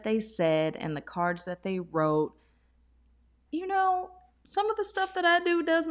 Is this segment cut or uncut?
cut